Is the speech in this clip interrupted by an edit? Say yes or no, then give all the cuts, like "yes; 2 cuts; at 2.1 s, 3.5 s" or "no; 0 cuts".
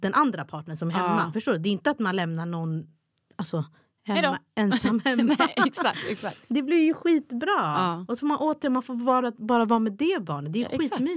no; 0 cuts